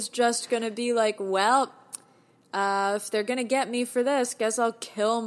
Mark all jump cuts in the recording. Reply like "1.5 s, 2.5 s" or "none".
none